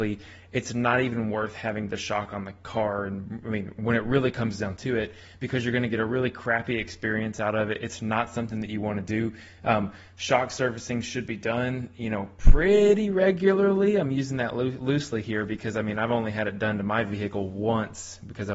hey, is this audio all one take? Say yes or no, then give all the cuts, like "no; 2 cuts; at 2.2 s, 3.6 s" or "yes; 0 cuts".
yes; 0 cuts